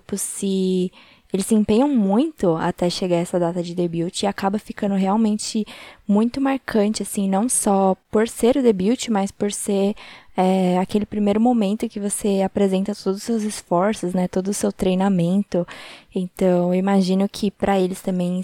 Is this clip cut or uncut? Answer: uncut